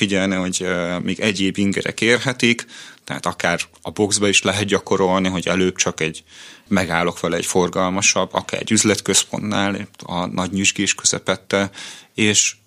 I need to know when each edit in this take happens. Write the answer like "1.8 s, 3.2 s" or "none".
none